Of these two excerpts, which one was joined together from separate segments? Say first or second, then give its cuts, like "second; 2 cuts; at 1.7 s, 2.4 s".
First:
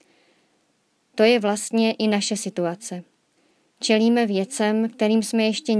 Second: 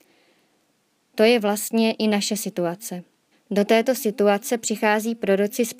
second; 1 cut; at 3.3 s